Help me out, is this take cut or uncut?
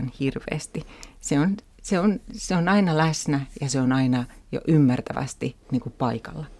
cut